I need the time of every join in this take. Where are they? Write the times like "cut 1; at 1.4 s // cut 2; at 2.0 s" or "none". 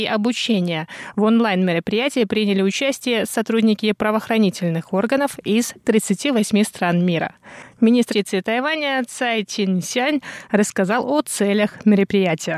cut 1; at 8.1 s